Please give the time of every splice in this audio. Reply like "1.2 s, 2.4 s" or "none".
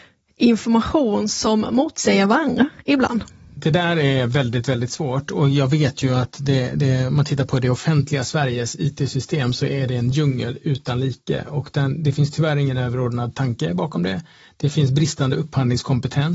none